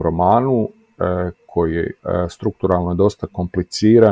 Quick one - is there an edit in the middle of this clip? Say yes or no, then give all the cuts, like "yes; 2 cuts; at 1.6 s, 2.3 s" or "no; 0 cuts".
yes; 1 cut; at 2.0 s